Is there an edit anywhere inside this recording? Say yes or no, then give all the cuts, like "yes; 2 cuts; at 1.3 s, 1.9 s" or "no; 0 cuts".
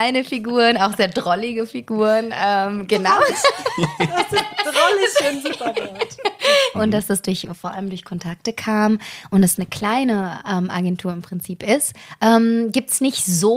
yes; 1 cut; at 6.7 s